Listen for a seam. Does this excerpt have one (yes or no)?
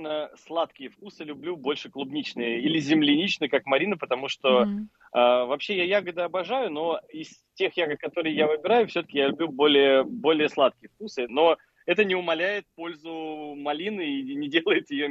yes